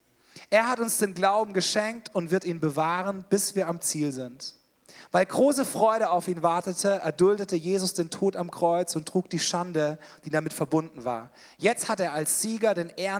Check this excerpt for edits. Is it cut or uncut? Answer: uncut